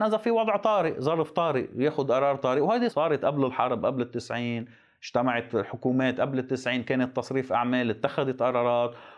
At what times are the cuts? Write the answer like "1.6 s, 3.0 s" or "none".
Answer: 2.9 s